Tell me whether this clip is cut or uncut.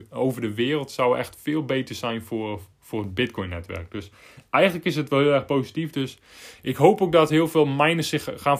uncut